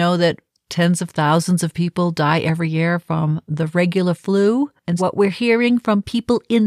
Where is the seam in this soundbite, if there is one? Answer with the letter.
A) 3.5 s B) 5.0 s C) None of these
B